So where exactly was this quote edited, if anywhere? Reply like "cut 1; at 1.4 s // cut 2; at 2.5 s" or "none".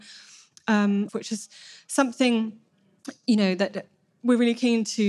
cut 1; at 1.1 s